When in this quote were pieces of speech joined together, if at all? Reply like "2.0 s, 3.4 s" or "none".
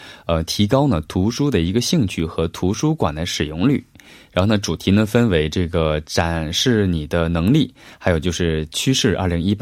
none